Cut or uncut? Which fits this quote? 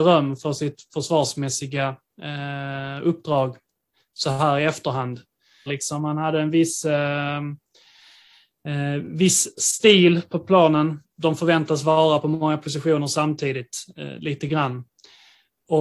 cut